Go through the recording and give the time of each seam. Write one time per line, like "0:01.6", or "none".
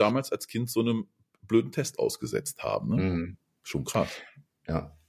none